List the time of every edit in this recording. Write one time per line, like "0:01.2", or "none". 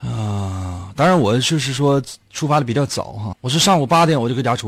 0:03.3